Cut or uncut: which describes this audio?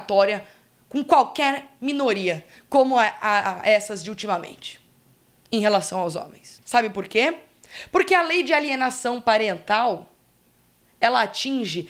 cut